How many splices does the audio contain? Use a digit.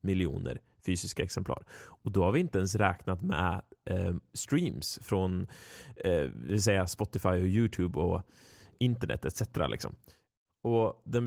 0